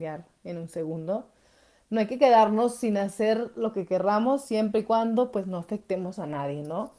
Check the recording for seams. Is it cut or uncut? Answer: uncut